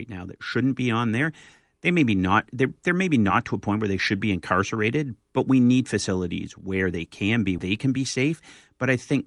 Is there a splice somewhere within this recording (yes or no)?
yes